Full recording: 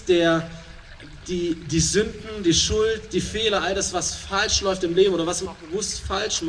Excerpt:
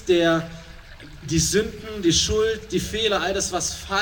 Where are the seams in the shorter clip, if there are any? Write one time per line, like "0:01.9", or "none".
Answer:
0:01.2

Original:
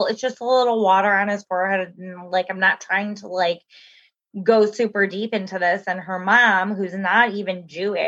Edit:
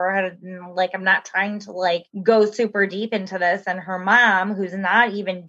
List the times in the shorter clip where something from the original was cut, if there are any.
0:02.1

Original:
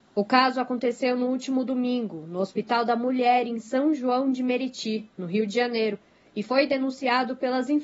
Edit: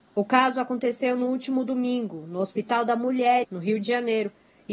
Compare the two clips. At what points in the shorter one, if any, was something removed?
0:03.4

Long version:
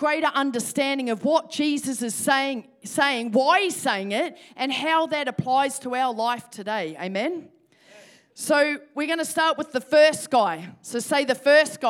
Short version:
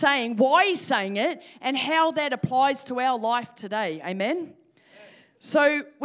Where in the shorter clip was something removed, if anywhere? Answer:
none

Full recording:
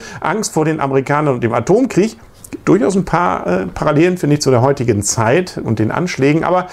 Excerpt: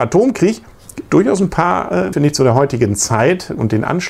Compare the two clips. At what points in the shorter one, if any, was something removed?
0:02.1

